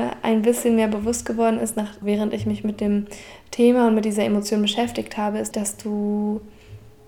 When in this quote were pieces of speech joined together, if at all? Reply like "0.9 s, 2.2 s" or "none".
2.0 s, 5.5 s